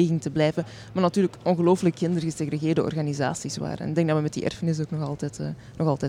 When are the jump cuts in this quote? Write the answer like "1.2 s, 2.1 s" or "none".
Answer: none